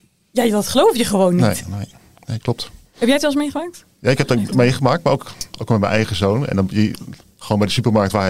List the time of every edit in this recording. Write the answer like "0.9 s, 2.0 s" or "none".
none